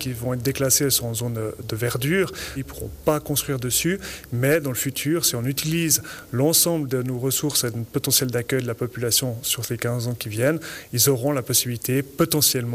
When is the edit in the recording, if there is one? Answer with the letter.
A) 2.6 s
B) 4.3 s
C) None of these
A